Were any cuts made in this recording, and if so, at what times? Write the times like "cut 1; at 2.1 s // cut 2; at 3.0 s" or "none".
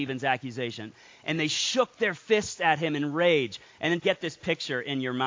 cut 1; at 4.0 s